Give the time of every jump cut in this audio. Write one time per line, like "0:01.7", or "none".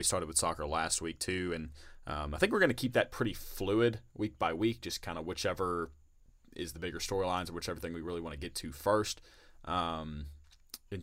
none